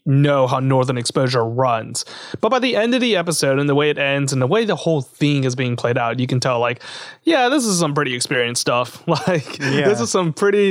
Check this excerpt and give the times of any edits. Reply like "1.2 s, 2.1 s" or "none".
none